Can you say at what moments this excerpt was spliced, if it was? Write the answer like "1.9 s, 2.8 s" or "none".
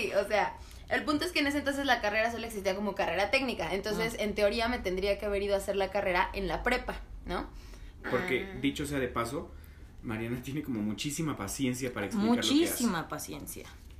8.0 s